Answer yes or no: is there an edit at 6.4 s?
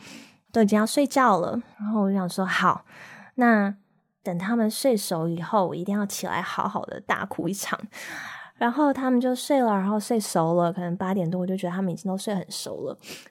no